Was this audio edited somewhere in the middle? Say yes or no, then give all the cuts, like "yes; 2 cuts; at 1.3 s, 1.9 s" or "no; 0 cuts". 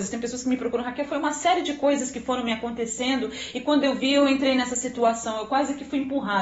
no; 0 cuts